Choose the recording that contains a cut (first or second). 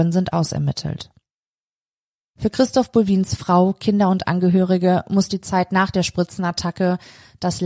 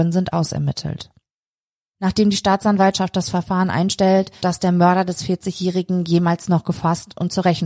second